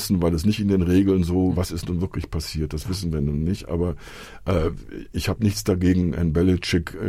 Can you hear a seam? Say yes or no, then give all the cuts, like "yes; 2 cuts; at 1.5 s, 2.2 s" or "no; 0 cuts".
yes; 1 cut; at 1.5 s